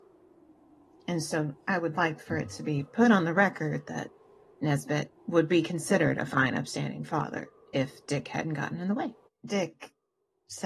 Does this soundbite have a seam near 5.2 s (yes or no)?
yes